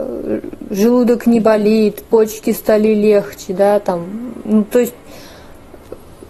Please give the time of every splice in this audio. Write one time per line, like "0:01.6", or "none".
none